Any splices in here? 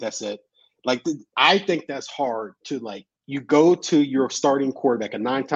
yes; 1 cut; at 3.1 s

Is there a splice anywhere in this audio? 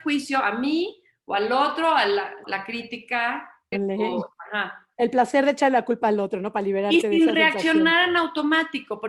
yes; 2 cuts; at 2.4 s, 3.7 s

